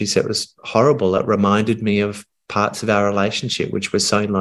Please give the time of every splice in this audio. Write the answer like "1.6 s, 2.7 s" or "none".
none